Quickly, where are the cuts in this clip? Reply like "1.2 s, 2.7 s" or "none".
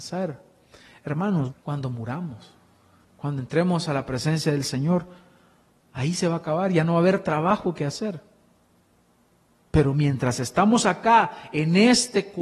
1.5 s